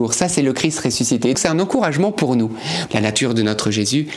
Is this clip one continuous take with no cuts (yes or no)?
no